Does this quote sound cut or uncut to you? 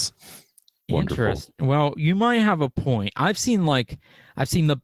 uncut